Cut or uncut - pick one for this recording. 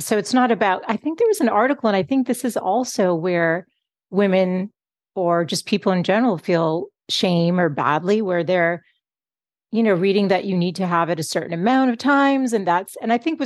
uncut